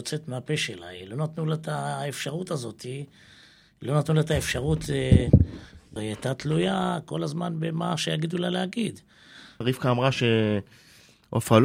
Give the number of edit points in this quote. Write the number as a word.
two